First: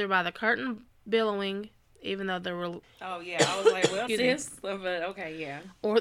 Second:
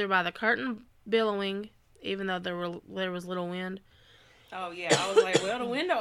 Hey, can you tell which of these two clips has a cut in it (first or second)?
first